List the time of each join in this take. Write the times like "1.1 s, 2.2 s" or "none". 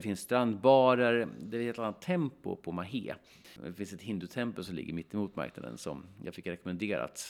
3.4 s